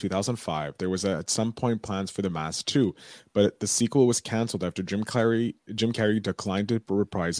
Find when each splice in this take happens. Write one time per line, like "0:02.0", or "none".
none